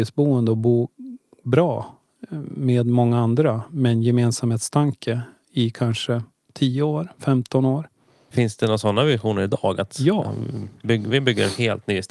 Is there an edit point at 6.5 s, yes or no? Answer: yes